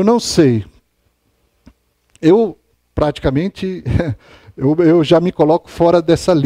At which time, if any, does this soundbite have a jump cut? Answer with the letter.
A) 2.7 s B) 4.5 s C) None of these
C